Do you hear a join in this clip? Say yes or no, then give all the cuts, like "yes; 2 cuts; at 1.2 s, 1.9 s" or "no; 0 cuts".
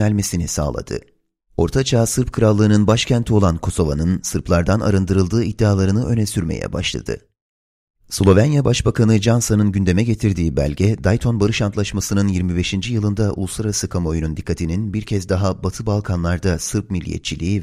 yes; 2 cuts; at 1.4 s, 8.0 s